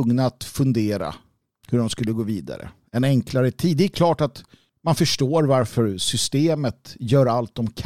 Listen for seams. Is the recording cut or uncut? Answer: uncut